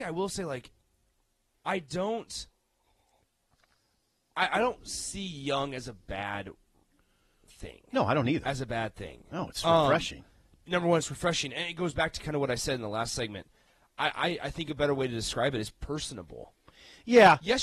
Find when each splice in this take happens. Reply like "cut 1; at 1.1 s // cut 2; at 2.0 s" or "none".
cut 1; at 8.4 s

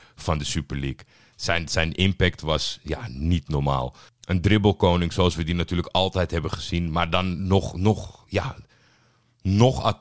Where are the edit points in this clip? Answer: none

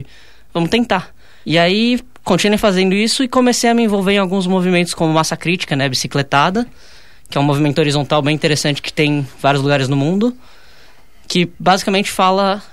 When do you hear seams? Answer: cut 1; at 1.4 s

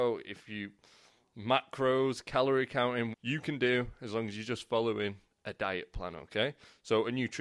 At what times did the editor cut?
cut 1; at 3.1 s

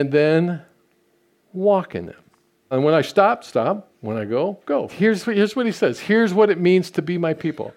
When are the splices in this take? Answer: cut 1; at 2.7 s // cut 2; at 4.9 s

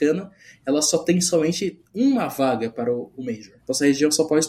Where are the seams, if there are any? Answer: cut 1; at 3.6 s

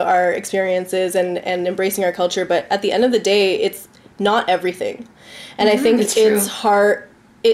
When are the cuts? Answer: none

